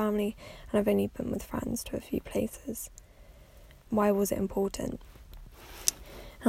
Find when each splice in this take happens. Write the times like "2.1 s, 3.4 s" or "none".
3.9 s